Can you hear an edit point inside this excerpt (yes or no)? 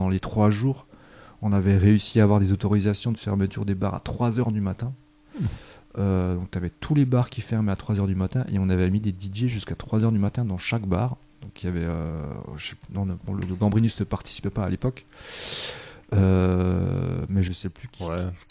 no